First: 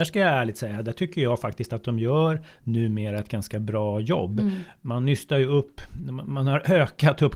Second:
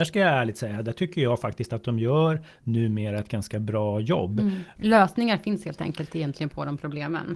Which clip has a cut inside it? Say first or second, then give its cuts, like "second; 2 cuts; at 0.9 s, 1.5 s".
second; 1 cut; at 4.8 s